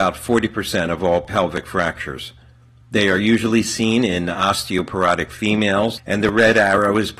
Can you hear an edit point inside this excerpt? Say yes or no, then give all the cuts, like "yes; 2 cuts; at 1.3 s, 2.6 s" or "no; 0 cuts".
yes; 2 cuts; at 2.8 s, 6.0 s